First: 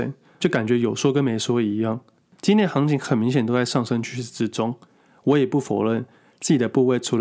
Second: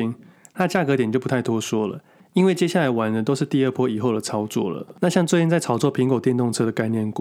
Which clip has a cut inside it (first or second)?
first